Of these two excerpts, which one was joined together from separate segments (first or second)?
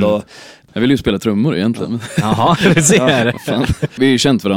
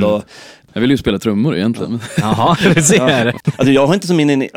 second